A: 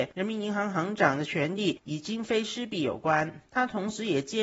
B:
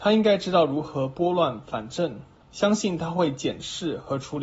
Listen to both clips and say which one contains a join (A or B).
A